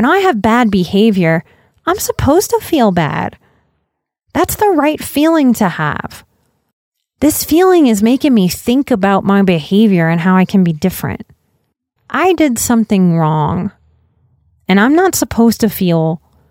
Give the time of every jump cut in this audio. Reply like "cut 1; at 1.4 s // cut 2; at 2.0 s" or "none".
cut 1; at 12.0 s